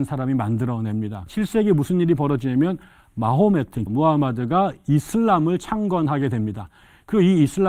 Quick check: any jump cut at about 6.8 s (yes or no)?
no